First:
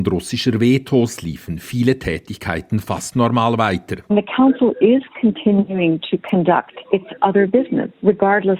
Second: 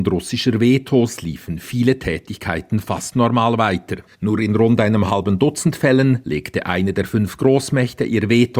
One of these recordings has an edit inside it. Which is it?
second; 1 cut; at 4.1 s

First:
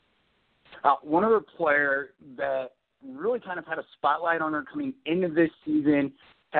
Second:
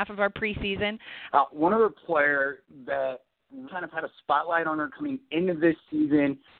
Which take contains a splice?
second; 2 cuts; at 1.3 s, 3.7 s

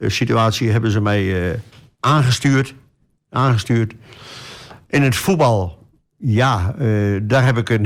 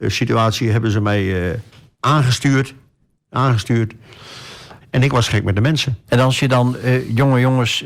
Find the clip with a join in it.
second; 2 cuts; at 4.8 s, 6.1 s

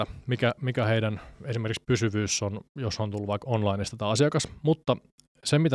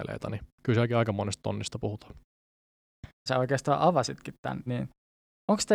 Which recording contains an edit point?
second; 2 cuts; at 3.3 s, 4.7 s

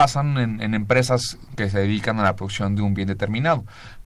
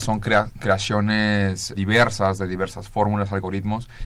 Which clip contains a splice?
second; 1 cut; at 1.7 s

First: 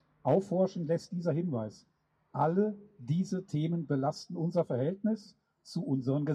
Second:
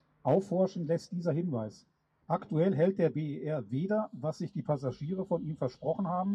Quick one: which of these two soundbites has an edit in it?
second; 1 cut; at 2.2 s

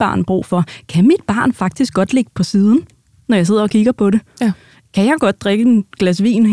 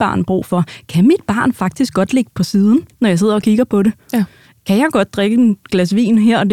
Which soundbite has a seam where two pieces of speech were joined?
second; 1 cut; at 2.9 s

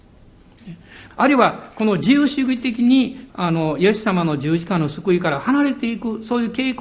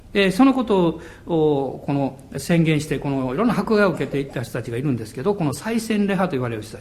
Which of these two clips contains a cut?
first; 2 cuts; at 1.1 s, 3.3 s

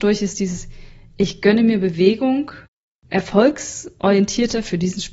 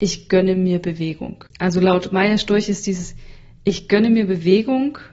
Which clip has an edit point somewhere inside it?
second; 1 cut; at 1.5 s

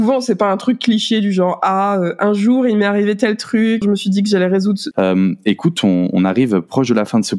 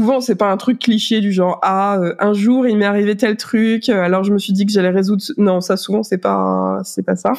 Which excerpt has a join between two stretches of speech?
first; 2 cuts; at 3.8 s, 4.9 s

